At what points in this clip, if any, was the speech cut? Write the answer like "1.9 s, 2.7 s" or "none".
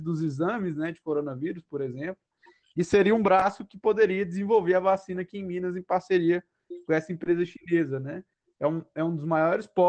8.4 s